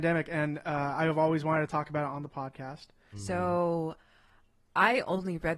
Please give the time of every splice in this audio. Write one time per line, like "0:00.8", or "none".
0:03.1